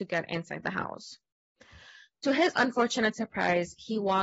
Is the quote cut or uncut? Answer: uncut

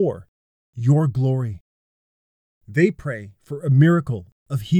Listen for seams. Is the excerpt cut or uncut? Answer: cut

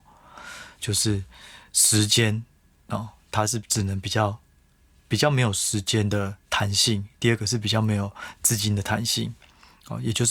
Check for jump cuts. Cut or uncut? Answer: uncut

